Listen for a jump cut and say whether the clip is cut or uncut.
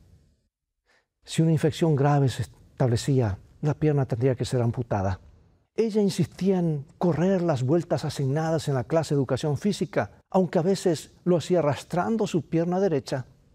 cut